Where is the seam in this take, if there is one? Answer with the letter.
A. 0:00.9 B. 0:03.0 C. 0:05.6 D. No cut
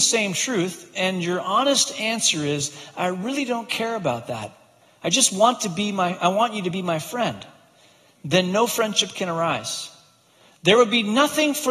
D